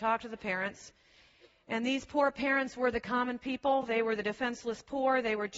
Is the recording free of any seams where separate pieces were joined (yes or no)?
yes